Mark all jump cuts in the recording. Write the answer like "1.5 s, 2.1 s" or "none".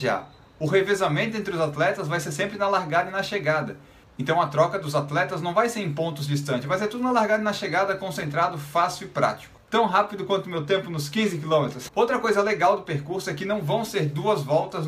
9.6 s, 11.9 s